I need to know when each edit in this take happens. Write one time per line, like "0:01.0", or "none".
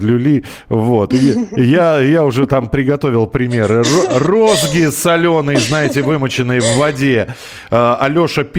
none